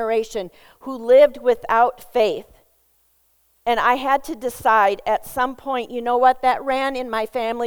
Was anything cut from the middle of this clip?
no; 0 cuts

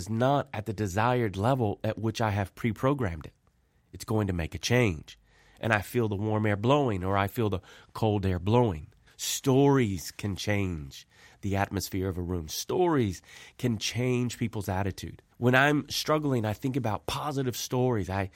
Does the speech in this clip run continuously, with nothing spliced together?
no; 2 cuts; at 9.1 s, 15.3 s

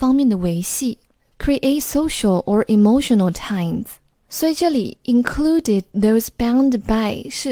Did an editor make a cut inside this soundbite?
no; 0 cuts

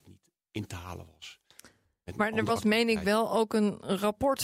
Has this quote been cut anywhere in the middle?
no; 0 cuts

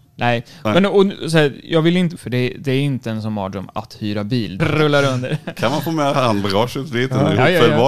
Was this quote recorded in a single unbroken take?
no; 2 cuts; at 2.2 s, 4.6 s

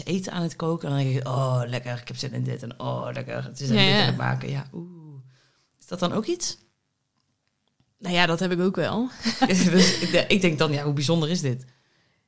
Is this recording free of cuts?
no; 1 cut; at 9.4 s

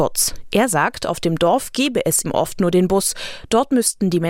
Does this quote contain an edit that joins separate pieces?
yes; 1 cut; at 2.2 s

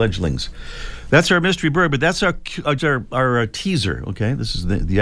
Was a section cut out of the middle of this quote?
yes; 1 cut; at 2.8 s

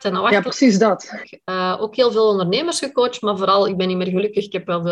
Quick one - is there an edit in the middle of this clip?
yes; 1 cut; at 1.2 s

